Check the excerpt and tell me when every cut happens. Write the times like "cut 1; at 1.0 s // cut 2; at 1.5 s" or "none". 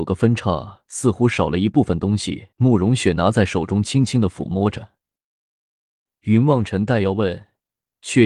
cut 1; at 2.5 s